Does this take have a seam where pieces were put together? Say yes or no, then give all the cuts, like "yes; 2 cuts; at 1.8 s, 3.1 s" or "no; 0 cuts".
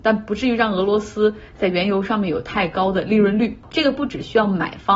yes; 1 cut; at 3.6 s